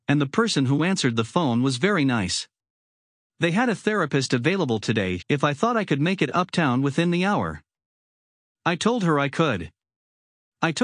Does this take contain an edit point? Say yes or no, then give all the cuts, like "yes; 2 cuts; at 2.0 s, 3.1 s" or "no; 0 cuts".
yes; 1 cut; at 5.2 s